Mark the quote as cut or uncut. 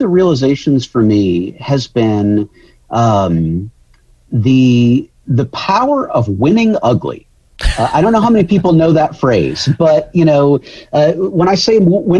uncut